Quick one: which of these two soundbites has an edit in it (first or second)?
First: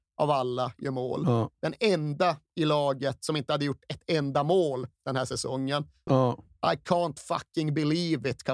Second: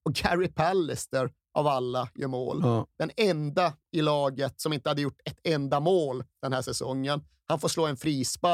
first